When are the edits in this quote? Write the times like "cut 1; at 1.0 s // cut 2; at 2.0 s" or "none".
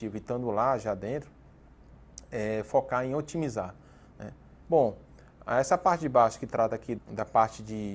cut 1; at 4.6 s // cut 2; at 7.0 s